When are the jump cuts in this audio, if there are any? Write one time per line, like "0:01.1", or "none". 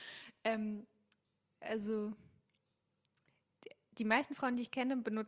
0:01.5